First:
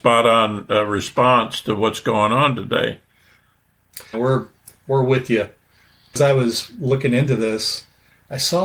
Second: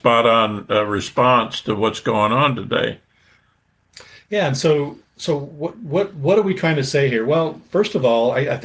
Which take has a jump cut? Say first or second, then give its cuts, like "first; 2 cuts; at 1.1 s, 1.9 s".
first; 2 cuts; at 4.1 s, 6.1 s